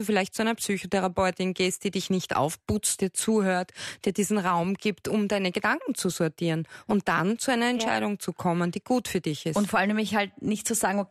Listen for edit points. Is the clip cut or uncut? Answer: cut